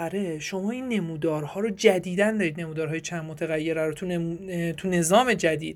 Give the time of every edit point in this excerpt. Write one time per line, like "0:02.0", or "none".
none

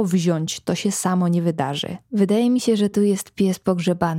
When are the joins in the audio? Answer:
none

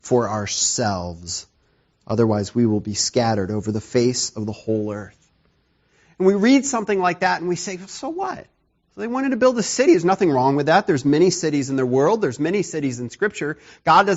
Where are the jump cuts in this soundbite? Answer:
none

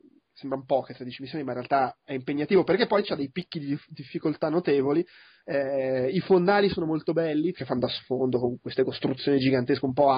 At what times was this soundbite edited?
0:05.4
0:07.5

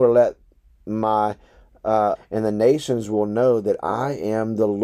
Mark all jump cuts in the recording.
0:02.2

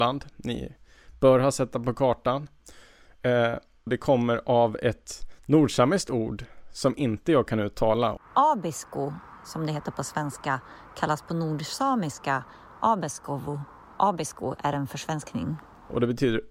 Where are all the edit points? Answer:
0:03.9

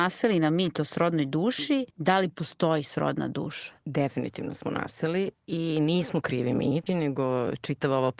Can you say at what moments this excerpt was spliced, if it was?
0:01.9
0:06.9

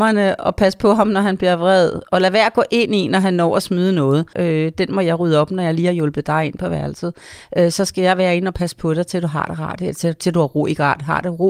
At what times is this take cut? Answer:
0:04.3

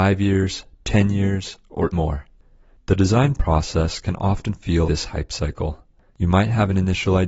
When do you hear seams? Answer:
0:01.9
0:04.8

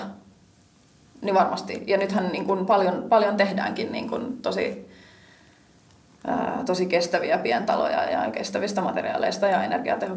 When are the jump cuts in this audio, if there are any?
0:08.0

